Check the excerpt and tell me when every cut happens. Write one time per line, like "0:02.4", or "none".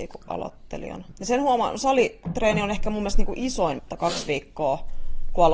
0:01.1
0:03.8